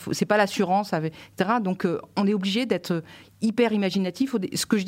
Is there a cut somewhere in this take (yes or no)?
no